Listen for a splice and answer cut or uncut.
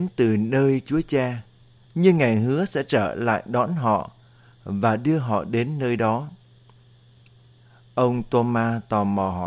cut